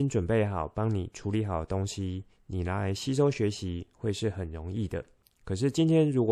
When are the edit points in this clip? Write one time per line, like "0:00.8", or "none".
none